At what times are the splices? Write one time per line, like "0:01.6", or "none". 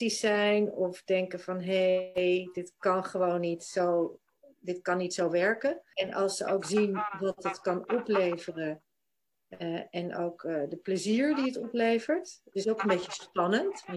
0:05.9
0:12.5